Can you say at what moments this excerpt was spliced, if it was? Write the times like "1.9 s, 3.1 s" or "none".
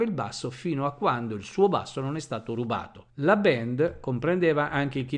3.1 s